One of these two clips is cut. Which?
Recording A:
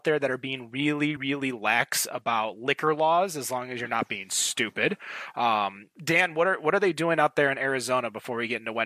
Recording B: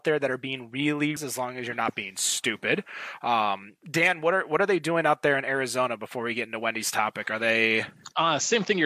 B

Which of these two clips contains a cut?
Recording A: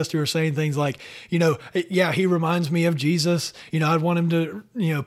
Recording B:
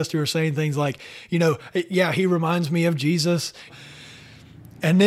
B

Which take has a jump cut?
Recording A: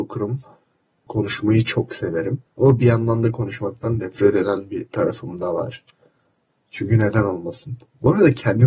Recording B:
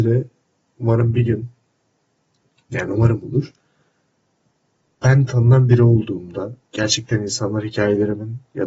A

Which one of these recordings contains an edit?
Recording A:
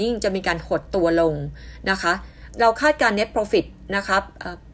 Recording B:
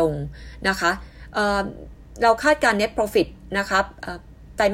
A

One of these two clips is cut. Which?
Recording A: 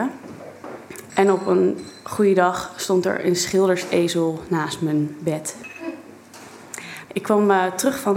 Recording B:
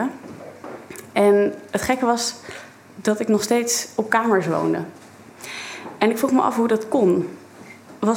A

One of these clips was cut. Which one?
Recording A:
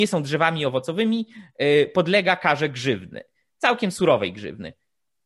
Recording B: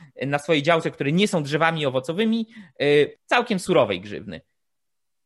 B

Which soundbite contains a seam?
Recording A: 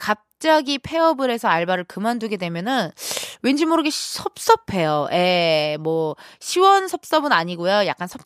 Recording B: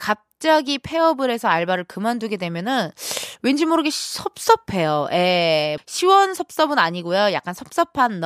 B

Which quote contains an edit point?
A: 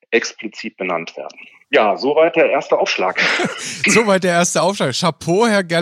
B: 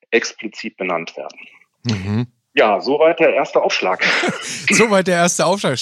A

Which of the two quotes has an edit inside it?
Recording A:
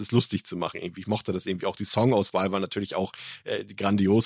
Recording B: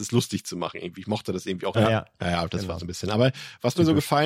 B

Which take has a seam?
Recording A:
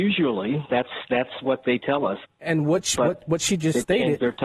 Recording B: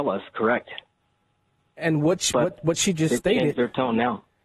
A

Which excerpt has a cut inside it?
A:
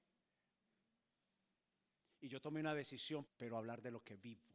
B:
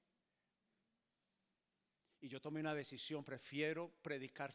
A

